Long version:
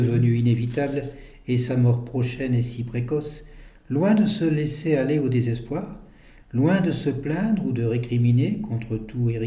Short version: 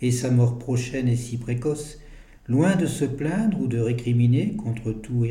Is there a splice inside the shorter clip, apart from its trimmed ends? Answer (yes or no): yes